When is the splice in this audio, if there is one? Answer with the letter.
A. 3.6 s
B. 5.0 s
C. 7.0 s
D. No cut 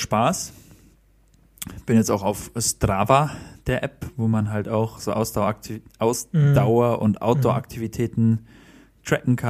B